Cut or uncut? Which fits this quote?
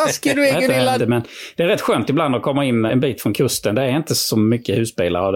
cut